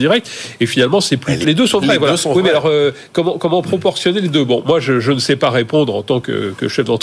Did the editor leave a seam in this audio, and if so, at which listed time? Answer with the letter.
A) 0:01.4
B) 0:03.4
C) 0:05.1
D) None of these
A